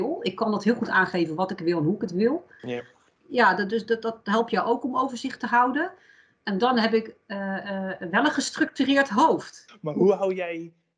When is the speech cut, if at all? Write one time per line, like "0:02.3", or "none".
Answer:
0:02.6
0:09.7